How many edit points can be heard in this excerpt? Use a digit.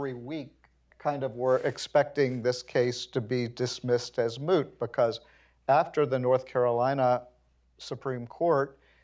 1